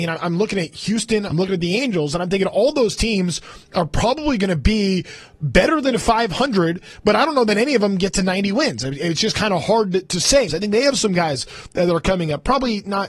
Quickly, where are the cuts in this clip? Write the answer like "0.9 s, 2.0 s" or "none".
1.3 s, 10.5 s

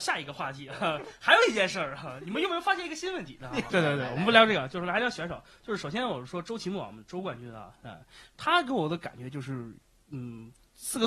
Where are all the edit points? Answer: 3.7 s

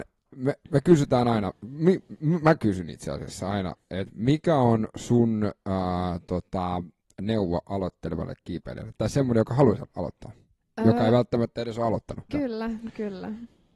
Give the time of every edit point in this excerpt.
9.8 s, 12.3 s

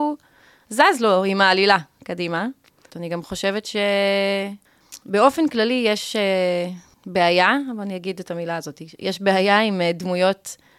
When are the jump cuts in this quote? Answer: 2.9 s

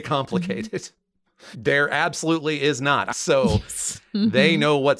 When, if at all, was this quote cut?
1.5 s, 3.1 s

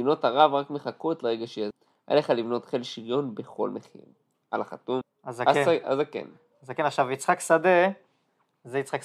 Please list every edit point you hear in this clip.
none

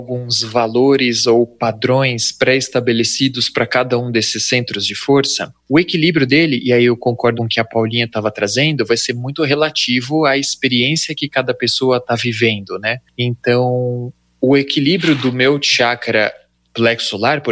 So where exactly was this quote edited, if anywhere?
7.3 s

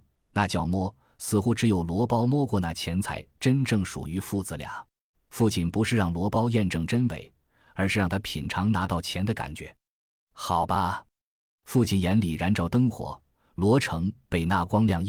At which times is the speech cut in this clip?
5.1 s

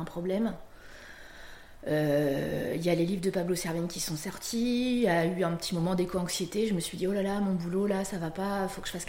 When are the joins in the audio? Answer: none

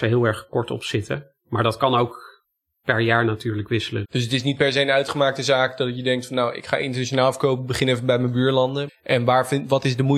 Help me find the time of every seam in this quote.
4.0 s, 8.9 s

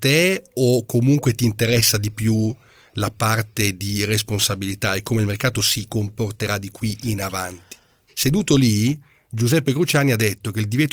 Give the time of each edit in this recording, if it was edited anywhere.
8.1 s

